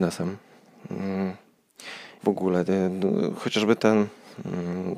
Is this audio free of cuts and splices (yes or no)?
no